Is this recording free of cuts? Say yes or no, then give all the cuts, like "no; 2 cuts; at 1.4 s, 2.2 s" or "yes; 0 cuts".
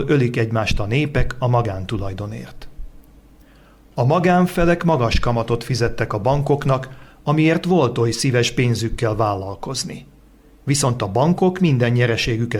yes; 0 cuts